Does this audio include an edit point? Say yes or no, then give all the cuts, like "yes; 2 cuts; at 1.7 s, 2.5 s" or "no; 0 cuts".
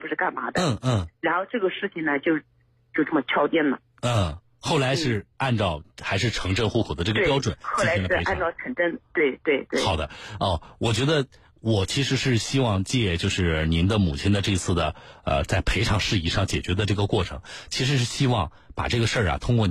no; 0 cuts